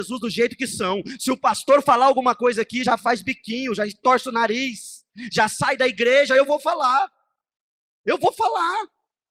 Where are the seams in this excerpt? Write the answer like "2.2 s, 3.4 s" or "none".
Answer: none